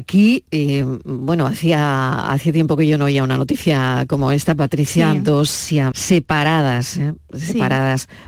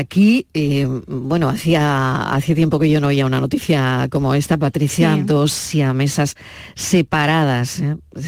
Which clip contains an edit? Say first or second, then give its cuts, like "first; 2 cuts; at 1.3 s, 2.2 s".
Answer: first; 1 cut; at 5.9 s